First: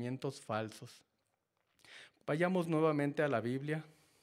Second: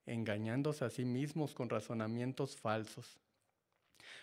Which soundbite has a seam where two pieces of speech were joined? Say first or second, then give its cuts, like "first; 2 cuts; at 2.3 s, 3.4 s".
first; 1 cut; at 2.2 s